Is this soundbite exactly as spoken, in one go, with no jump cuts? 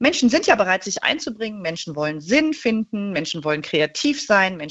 yes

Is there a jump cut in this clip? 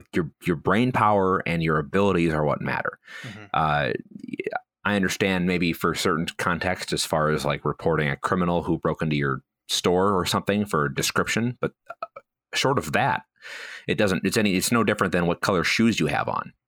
no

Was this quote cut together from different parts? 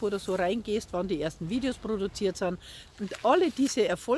yes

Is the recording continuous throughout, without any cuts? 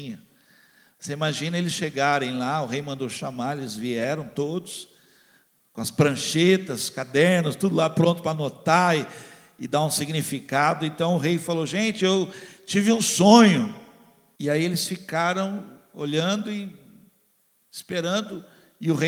no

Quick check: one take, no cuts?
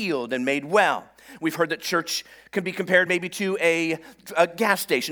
yes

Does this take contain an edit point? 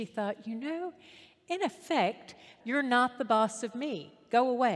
yes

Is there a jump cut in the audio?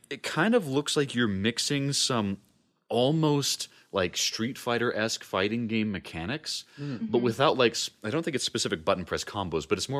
no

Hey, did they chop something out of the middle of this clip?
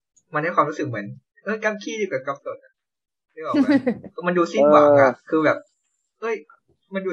no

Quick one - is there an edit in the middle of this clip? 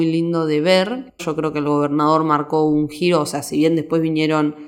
yes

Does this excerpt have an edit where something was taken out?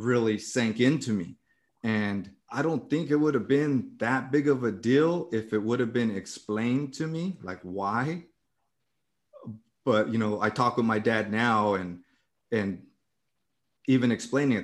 yes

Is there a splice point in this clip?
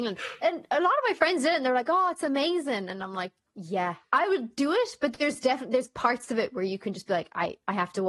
no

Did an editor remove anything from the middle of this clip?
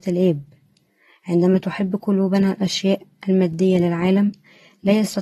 no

